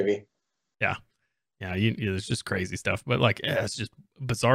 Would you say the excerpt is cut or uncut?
uncut